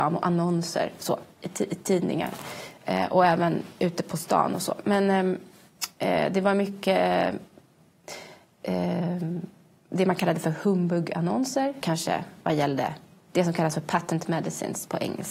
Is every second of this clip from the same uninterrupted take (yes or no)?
no